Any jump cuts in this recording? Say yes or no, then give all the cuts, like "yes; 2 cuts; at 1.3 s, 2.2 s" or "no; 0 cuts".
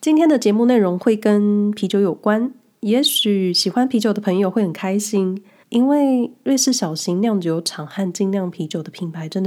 yes; 1 cut; at 5.6 s